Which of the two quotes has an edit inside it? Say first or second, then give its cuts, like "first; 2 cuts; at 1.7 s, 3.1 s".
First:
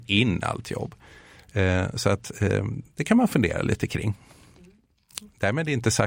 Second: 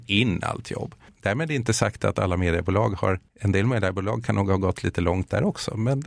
second; 2 cuts; at 1.1 s, 3.3 s